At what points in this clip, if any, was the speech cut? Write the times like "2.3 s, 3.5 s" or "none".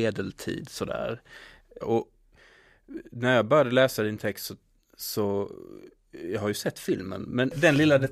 1.8 s